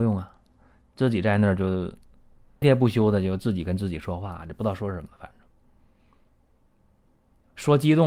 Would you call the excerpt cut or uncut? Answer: cut